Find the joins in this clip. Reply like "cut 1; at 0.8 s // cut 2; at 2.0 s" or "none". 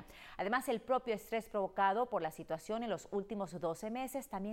none